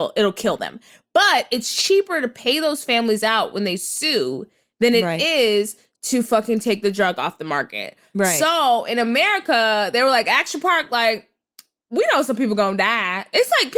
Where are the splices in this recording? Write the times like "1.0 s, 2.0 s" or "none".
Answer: none